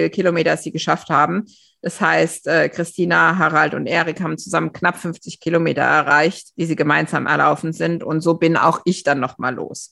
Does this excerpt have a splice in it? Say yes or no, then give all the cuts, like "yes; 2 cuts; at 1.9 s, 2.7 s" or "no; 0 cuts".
no; 0 cuts